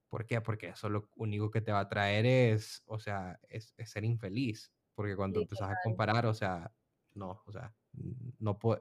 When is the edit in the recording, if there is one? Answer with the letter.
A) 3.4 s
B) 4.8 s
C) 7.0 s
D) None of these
D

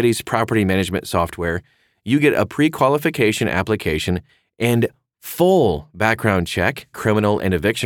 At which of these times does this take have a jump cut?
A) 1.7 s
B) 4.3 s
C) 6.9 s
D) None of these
C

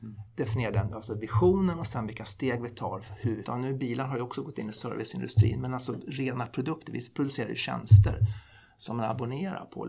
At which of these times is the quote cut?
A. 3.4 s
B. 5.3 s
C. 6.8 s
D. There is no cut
A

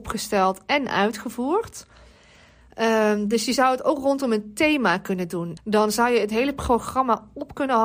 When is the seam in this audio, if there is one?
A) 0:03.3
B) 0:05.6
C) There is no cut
B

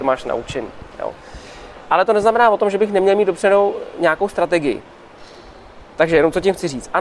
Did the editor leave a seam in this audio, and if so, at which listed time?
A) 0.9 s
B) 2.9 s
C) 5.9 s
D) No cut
D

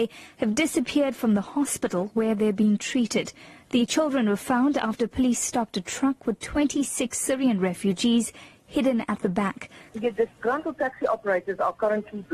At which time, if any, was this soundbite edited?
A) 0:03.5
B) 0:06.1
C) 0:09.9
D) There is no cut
C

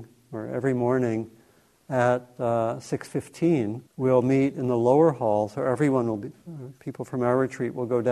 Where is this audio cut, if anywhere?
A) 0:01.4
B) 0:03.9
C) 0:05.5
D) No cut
B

